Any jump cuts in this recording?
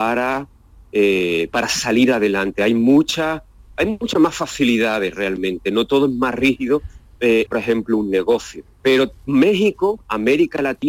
yes; 2 cuts; at 7.5 s, 8.8 s

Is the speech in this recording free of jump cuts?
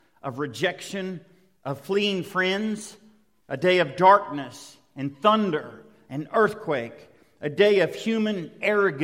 no; 1 cut; at 3.4 s

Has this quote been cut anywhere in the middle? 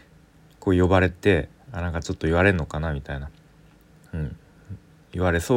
no; 0 cuts

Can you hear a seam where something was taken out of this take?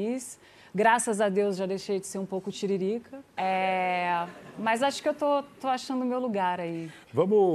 yes; 1 cut; at 3.4 s

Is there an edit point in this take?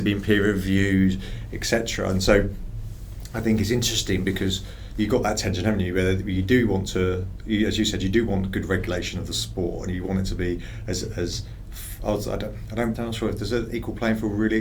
yes; 1 cut; at 12.9 s

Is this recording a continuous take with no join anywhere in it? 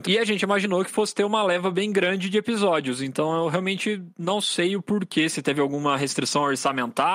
yes; 0 cuts

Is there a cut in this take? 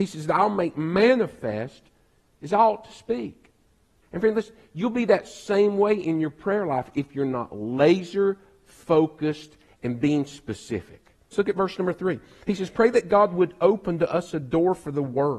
yes; 2 cuts; at 4.0 s, 11.3 s

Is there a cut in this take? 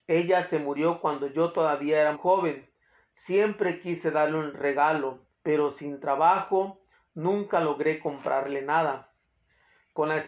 yes; 2 cuts; at 2.1 s, 5.3 s

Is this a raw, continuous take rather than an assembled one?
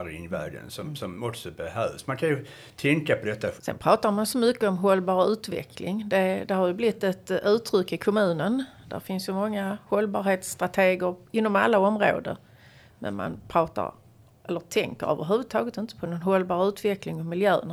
no; 1 cut; at 3.6 s

